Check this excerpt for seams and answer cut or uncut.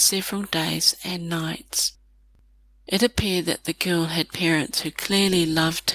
uncut